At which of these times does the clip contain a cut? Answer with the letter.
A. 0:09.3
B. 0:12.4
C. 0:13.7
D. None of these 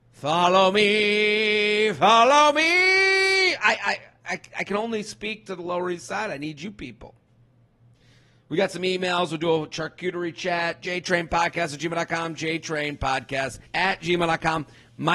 C